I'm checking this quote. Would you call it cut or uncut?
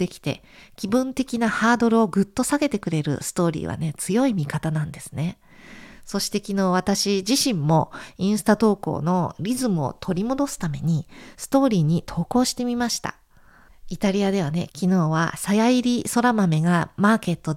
cut